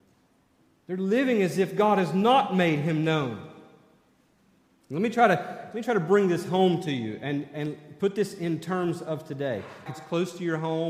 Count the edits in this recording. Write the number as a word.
one